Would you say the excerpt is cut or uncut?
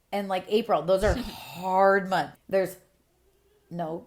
cut